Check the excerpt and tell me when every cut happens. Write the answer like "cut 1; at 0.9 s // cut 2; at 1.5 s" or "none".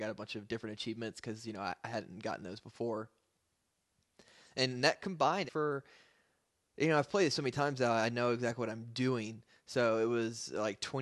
cut 1; at 5.5 s